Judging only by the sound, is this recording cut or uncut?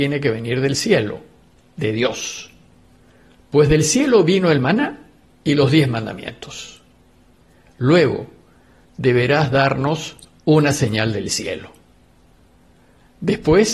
cut